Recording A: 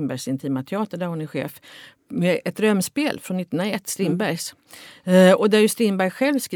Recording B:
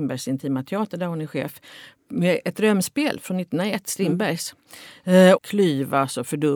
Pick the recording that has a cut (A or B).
B